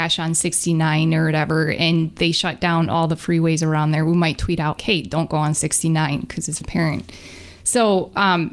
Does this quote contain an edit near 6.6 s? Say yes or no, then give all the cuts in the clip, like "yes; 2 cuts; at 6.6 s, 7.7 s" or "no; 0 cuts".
yes; 2 cuts; at 4.8 s, 6.6 s